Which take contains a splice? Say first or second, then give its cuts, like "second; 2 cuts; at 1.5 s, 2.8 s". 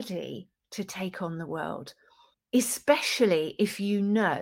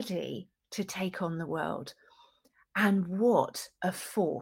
first; 1 cut; at 2.3 s